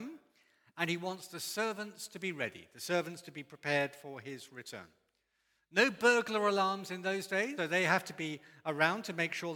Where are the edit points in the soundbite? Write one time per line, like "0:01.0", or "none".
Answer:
0:07.6

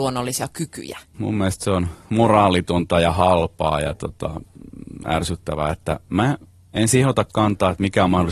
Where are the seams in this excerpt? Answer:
0:01.1

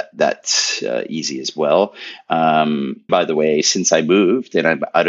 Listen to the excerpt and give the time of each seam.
0:03.1

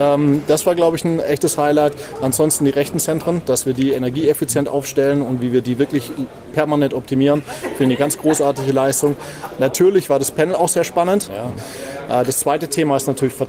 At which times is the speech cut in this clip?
0:11.3

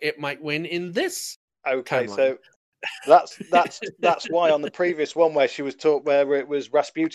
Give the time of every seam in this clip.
none

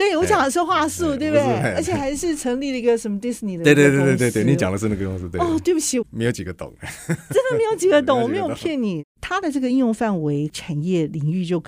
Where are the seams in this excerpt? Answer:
0:06.0

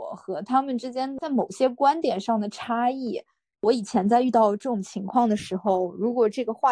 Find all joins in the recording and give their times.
0:03.5

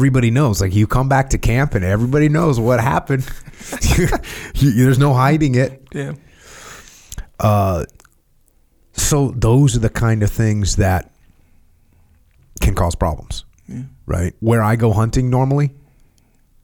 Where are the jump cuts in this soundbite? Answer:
0:14.4

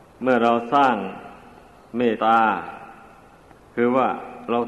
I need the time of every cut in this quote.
0:02.2

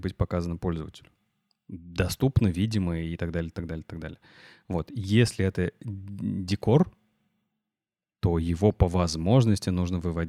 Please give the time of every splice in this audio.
none

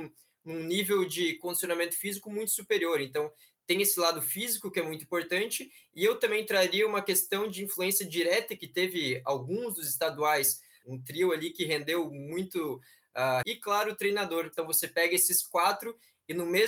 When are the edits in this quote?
0:10.8
0:13.4
0:14.5

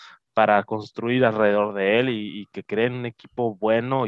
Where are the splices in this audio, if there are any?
none

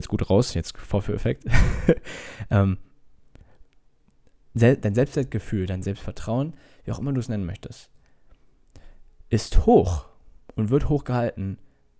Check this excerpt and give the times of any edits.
none

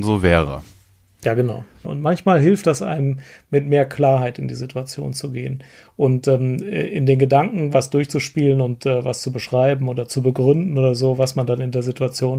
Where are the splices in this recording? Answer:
0:01.8

